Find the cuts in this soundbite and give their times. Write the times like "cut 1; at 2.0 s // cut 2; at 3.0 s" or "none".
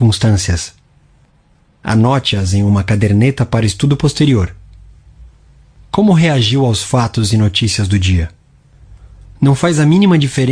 none